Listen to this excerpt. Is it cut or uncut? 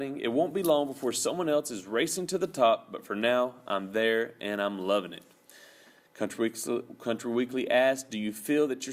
uncut